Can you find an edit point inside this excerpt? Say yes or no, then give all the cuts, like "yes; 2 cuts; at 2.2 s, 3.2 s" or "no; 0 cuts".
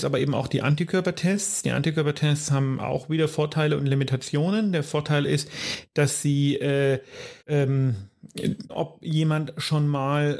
yes; 2 cuts; at 7.4 s, 8.7 s